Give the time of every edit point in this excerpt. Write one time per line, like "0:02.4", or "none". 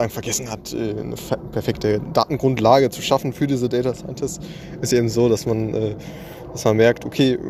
none